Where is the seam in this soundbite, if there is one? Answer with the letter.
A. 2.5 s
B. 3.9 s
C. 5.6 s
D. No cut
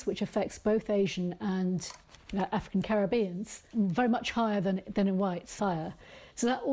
C